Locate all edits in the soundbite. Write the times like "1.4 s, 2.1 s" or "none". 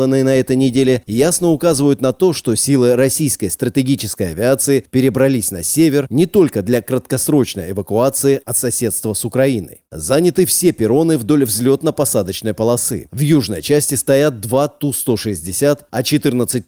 none